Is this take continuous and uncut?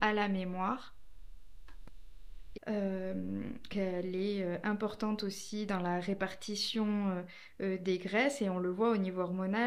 no; 2 cuts; at 2.5 s, 3.7 s

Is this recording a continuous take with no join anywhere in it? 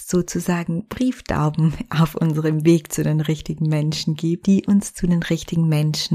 no; 1 cut; at 4.4 s

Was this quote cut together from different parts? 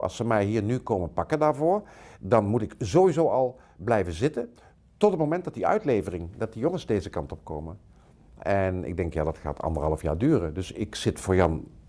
no; 0 cuts

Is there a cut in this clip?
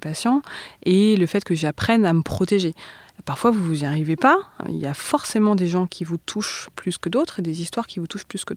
yes; 1 cut; at 4.6 s

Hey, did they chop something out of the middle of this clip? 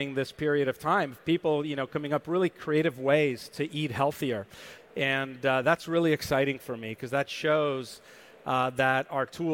yes; 1 cut; at 4.8 s

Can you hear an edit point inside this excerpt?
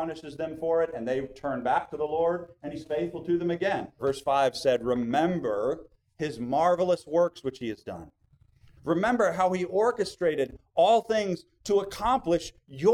yes; 2 cuts; at 4.0 s, 8.8 s

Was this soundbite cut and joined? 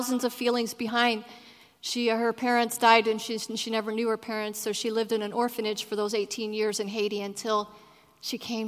no; 0 cuts

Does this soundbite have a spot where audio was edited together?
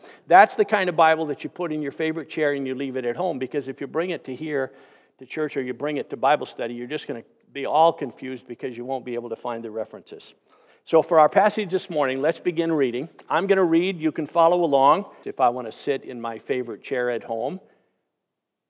yes; 1 cut; at 15.2 s

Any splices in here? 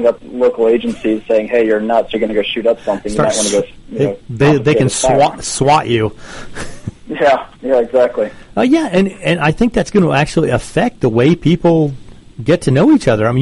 no; 0 cuts

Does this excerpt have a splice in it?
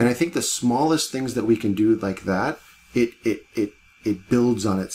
no; 0 cuts

